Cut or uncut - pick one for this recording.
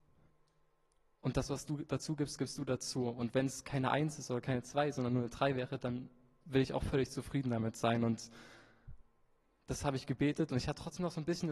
uncut